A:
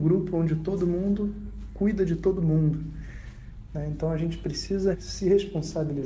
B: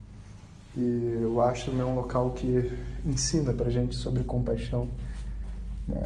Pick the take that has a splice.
A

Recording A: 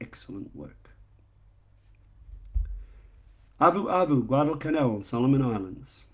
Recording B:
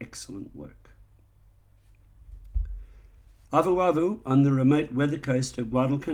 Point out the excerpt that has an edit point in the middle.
B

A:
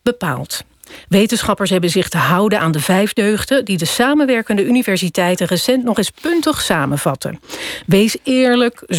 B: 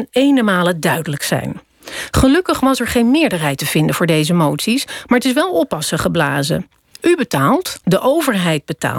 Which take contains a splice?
B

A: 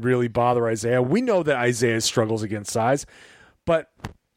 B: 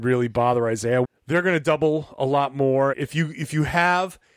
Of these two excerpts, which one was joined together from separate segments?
B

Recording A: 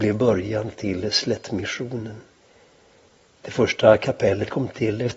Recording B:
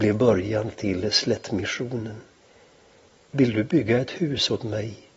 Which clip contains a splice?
B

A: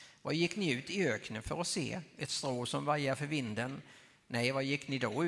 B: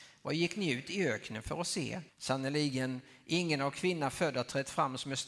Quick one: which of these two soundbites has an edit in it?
B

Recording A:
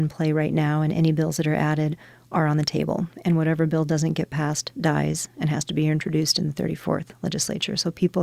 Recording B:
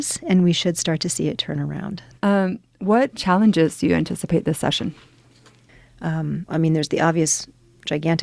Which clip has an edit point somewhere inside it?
B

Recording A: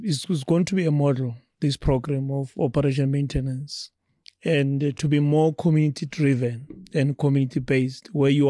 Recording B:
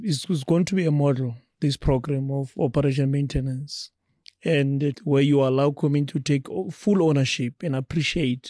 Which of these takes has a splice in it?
B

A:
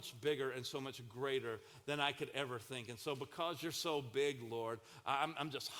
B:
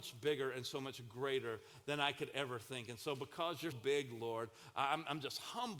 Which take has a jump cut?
B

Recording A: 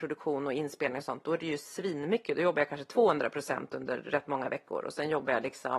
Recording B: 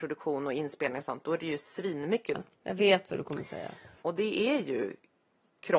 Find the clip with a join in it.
B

